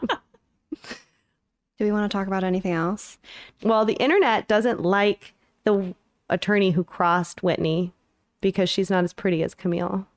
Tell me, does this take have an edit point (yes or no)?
yes